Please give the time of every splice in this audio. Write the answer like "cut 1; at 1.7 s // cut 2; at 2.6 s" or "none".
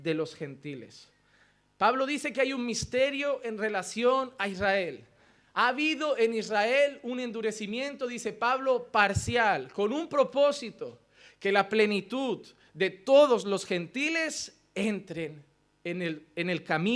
none